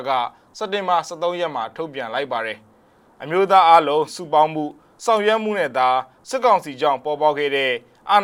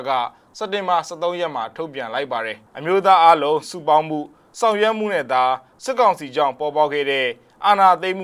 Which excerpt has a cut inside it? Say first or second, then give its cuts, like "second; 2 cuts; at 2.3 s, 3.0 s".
second; 1 cut; at 2.7 s